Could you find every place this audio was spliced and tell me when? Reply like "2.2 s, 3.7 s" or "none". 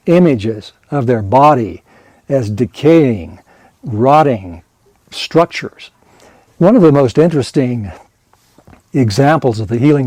6.5 s